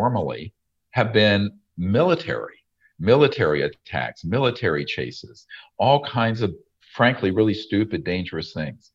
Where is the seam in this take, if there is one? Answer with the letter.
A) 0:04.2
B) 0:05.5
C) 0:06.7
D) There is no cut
D